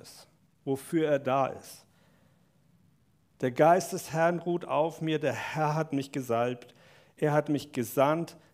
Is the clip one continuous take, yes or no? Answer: yes